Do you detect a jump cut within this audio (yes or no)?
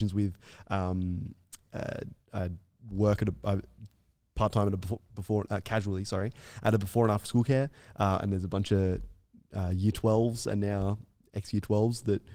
no